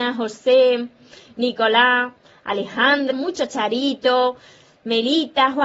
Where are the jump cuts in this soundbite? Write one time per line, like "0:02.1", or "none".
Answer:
0:03.1